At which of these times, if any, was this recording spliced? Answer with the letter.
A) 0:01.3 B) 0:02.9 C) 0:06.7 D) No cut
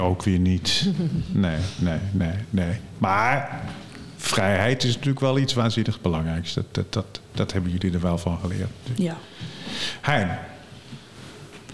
D